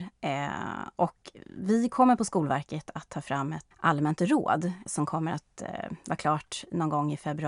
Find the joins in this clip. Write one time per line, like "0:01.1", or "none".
0:03.7
0:04.9